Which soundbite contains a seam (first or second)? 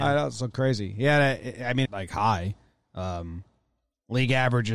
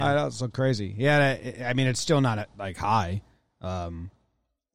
first